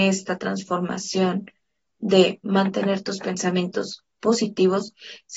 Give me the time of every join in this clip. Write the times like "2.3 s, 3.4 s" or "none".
none